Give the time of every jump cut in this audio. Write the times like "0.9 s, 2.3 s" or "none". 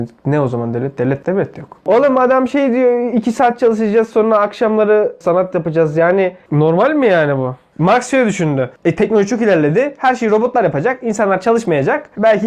5.2 s